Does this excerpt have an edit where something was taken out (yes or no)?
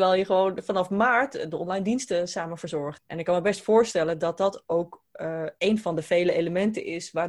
yes